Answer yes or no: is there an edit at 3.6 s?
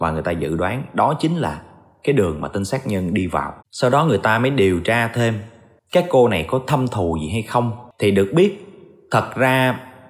yes